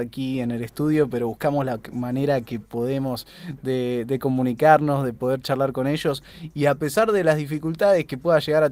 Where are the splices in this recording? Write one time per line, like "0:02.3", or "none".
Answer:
none